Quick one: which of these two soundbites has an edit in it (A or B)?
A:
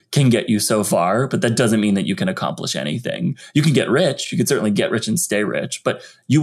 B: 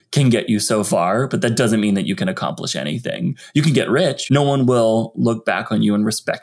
B